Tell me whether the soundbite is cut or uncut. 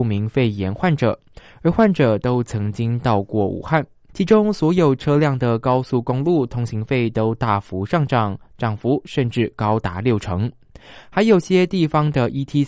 cut